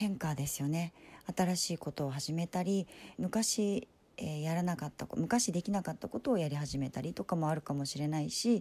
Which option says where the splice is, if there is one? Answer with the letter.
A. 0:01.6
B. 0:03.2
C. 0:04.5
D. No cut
B